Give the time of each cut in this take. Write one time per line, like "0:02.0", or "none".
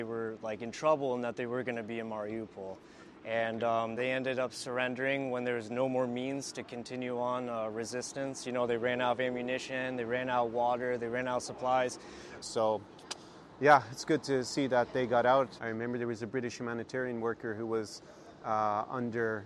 0:04.0
0:12.4
0:15.6